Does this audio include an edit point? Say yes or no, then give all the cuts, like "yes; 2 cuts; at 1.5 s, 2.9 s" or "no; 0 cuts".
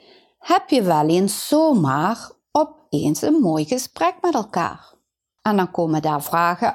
yes; 1 cut; at 5.4 s